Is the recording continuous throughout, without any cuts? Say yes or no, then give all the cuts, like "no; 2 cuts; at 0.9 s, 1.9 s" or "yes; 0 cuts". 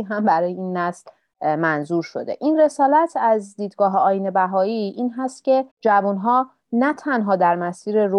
no; 1 cut; at 5.7 s